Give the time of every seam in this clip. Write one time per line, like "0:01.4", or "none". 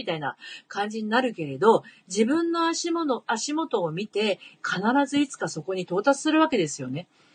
0:04.5

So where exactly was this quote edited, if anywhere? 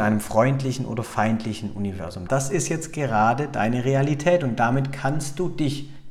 0:02.3

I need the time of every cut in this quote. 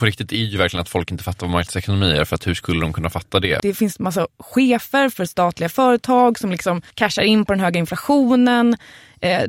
0:03.6
0:06.9

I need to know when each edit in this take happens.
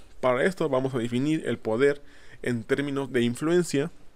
0:03.1

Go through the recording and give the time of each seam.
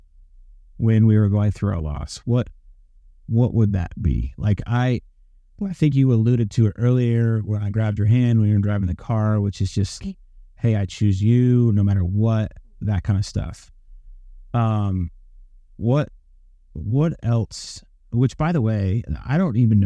0:10.0

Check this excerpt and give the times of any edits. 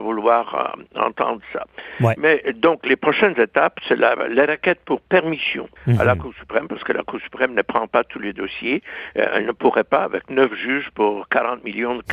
0:05.8

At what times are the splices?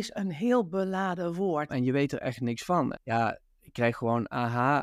0:01.7
0:02.9

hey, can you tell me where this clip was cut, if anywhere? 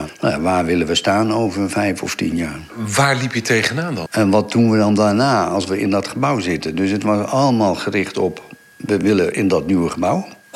0:04.1

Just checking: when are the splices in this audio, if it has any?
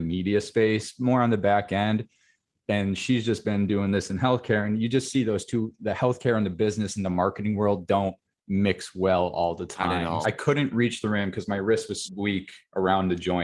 0:10.2
0:12.0

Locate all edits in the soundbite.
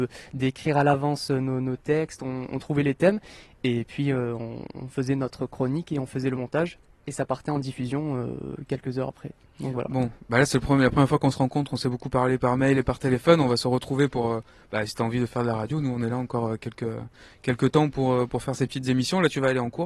none

